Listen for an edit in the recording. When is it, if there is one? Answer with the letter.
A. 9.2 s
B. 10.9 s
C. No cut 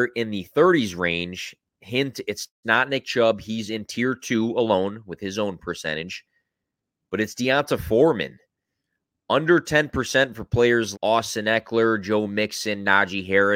B